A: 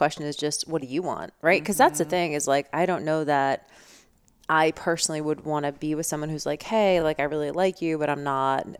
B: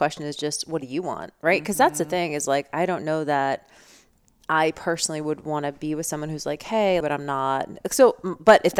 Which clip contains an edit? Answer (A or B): B